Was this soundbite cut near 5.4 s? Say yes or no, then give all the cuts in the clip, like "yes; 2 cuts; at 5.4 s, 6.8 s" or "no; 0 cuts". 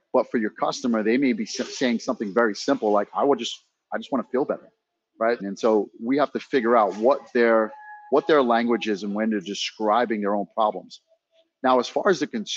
yes; 1 cut; at 5.4 s